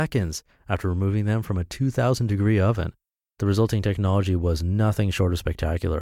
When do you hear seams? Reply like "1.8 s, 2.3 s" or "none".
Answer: 3.2 s